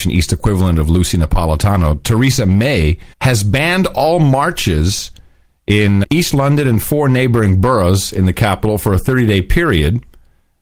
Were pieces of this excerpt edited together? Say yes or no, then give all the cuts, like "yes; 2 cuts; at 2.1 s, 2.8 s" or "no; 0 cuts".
yes; 2 cuts; at 3.1 s, 6.0 s